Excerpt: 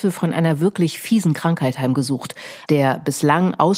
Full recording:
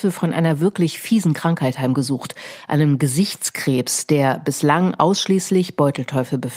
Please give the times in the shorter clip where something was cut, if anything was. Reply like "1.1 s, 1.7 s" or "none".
2.7 s